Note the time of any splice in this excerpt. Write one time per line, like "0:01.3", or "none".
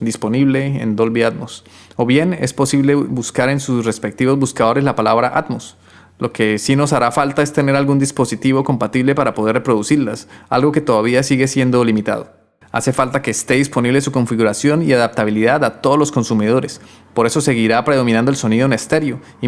0:12.6